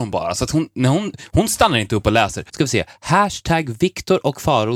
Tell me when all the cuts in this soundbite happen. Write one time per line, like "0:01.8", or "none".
0:02.5